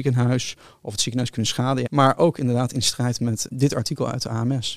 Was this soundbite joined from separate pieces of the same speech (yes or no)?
yes